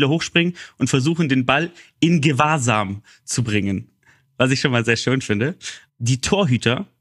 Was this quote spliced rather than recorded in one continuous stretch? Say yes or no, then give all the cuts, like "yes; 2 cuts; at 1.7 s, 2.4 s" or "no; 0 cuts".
yes; 1 cut; at 5.9 s